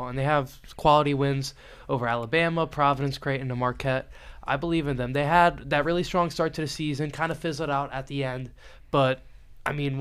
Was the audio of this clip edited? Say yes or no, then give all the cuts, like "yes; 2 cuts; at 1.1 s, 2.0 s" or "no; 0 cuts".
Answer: no; 0 cuts